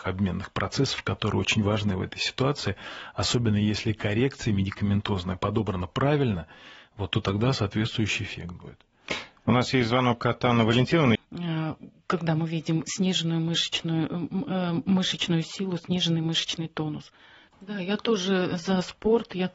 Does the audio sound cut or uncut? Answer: cut